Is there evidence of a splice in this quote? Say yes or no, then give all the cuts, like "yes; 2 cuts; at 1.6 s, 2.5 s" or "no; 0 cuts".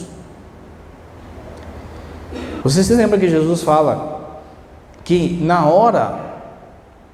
yes; 1 cut; at 2.6 s